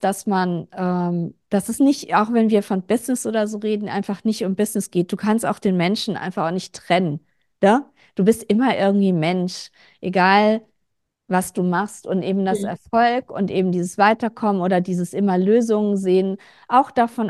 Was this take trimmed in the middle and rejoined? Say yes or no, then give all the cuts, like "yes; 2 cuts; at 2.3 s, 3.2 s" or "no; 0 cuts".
no; 0 cuts